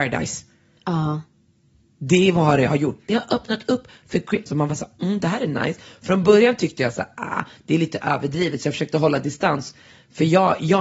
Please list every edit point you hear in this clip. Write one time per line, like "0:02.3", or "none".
0:04.5